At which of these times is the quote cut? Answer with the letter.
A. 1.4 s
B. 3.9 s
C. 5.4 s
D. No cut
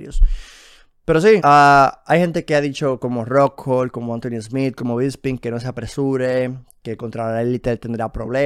A